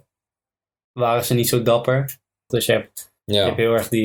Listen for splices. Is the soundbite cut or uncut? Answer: cut